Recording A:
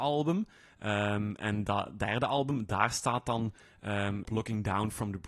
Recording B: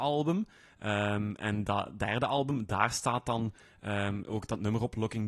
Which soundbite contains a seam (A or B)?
A